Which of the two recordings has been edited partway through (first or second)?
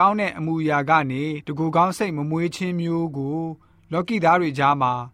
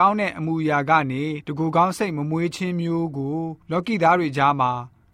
second